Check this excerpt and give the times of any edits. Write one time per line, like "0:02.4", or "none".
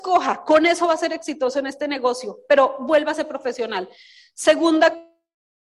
none

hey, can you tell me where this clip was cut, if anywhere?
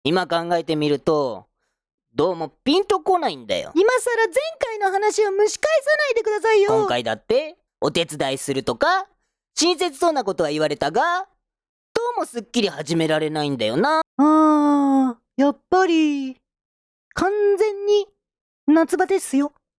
0:07.7
0:14.0
0:17.0

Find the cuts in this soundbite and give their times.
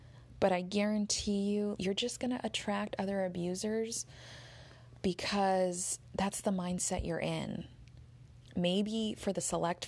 0:01.8
0:08.5

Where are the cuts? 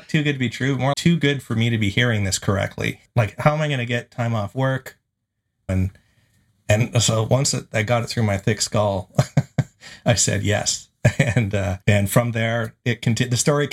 0:00.9
0:05.7
0:11.8

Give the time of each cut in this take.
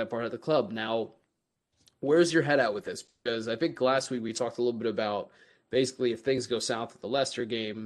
none

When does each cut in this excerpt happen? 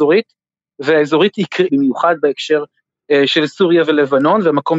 0:01.7

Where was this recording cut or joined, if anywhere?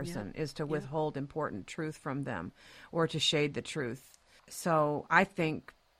none

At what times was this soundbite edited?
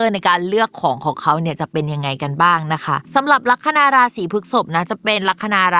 0:03.0

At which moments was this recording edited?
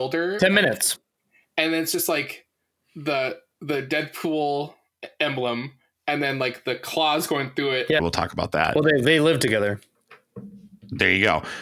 0:08.0

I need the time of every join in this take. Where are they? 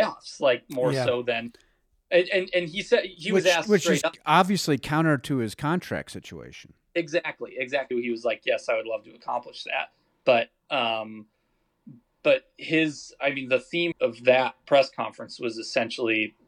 0:07.9
0:13.9

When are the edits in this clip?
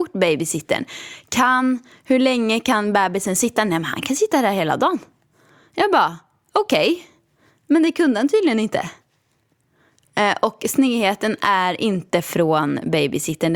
none

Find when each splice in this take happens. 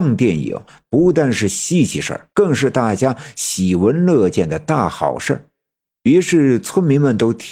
0:02.3

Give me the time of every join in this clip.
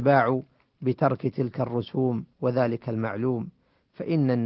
0:02.3

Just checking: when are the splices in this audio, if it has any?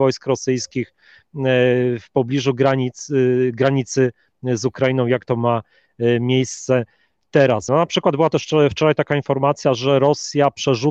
0:07.7

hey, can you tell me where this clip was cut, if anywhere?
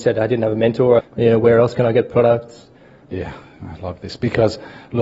0:01.0
0:03.1

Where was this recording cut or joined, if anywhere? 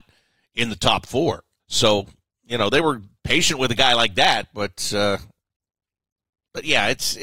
0:01.6

